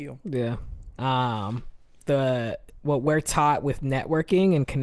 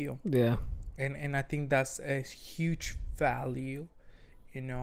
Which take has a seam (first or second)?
first